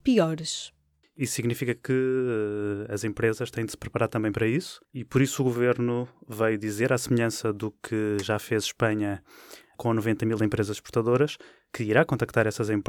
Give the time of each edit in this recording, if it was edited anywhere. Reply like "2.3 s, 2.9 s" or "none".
1.0 s, 4.8 s